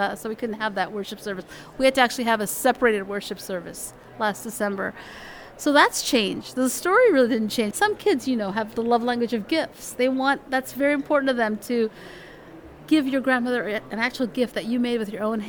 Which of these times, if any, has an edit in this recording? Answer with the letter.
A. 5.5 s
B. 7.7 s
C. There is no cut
B